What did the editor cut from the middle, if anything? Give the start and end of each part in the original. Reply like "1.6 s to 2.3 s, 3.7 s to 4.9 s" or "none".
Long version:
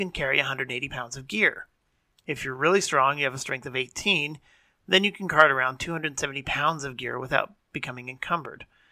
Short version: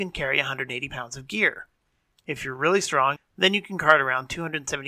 3.2 s to 4.7 s